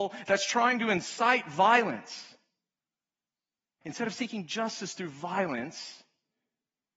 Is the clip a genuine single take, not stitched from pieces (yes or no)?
no